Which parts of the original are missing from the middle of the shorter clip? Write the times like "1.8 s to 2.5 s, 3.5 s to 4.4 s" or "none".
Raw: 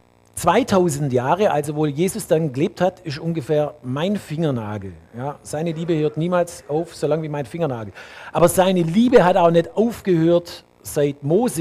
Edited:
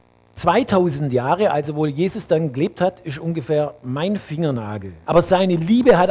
5.0 s to 8.3 s